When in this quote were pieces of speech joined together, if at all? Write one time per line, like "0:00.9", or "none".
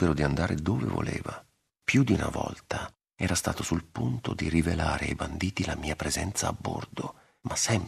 0:01.7